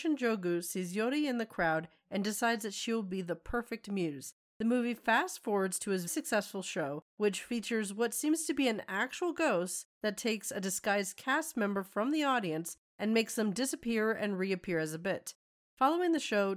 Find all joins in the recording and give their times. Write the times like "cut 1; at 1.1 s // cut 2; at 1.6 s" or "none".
cut 1; at 6.1 s